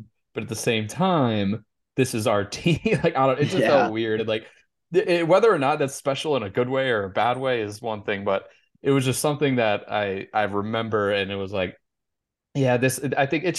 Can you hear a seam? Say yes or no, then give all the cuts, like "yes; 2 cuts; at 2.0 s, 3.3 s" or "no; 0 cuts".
no; 0 cuts